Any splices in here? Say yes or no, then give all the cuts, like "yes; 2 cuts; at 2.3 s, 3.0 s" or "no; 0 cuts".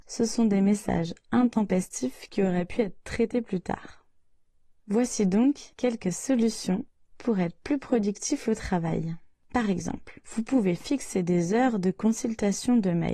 no; 0 cuts